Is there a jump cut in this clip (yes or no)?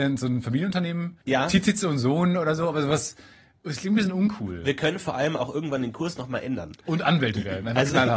yes